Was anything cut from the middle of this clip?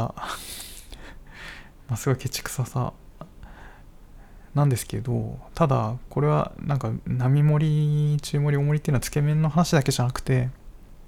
no; 0 cuts

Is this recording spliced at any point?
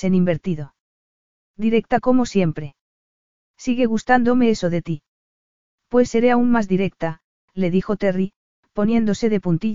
no; 0 cuts

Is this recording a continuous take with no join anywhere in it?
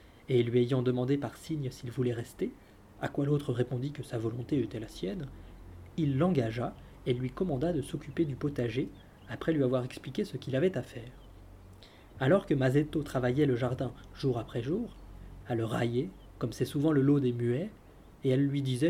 no; 2 cuts; at 12.2 s, 15.4 s

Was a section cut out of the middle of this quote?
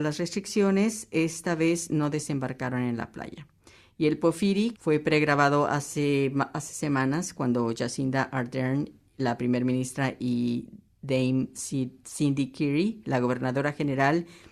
yes; 1 cut; at 4.7 s

